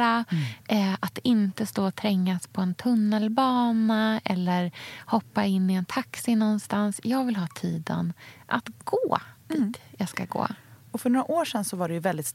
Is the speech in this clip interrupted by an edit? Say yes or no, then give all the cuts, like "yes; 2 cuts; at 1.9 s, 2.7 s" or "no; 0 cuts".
no; 0 cuts